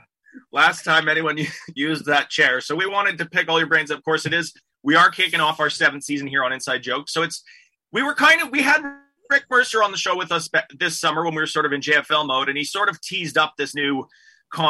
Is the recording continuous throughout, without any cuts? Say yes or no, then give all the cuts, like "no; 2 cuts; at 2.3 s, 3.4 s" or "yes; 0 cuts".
yes; 0 cuts